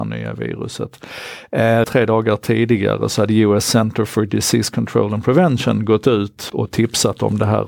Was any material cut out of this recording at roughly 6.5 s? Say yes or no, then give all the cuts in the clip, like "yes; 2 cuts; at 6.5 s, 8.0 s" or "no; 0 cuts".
yes; 2 cuts; at 1.8 s, 6.5 s